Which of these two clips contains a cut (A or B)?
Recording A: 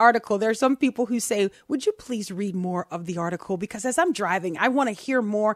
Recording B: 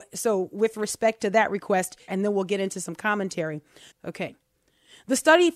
B